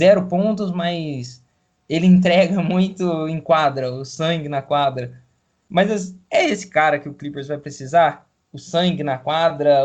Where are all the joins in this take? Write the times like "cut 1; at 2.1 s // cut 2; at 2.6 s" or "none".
none